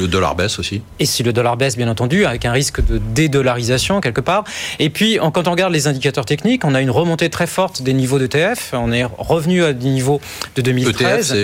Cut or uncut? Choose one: uncut